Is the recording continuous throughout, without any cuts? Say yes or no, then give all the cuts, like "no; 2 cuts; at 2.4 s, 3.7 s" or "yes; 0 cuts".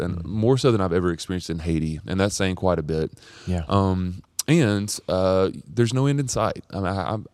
yes; 0 cuts